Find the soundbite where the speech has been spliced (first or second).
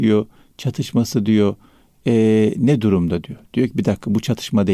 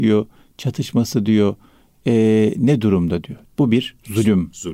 second